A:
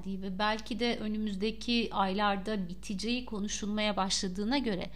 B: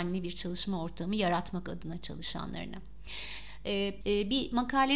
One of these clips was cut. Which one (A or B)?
B